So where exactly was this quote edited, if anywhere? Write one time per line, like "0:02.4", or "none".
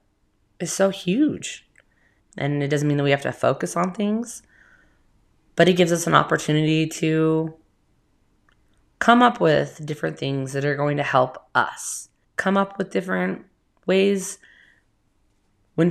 0:02.2
0:12.2